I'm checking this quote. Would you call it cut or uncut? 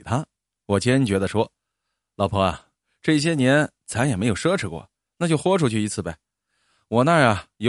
uncut